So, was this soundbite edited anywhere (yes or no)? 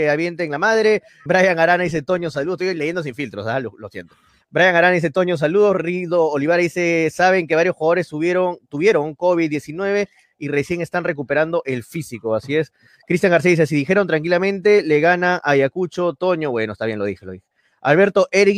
yes